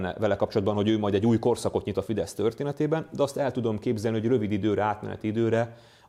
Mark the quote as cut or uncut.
uncut